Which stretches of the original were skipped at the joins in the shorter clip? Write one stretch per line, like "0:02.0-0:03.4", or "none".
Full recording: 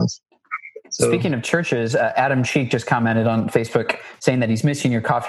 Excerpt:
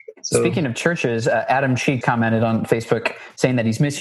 0:02.7-0:02.8